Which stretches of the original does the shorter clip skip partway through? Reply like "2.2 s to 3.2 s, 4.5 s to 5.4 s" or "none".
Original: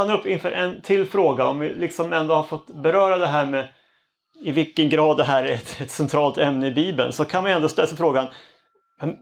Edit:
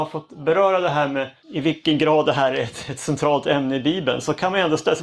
3.8 s to 4.3 s